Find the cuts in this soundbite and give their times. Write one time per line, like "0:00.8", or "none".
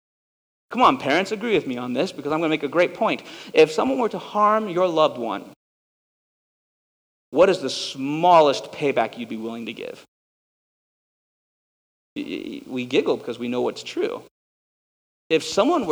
none